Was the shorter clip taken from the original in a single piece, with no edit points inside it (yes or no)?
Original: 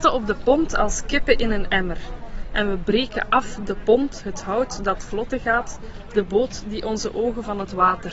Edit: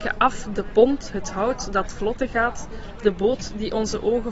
yes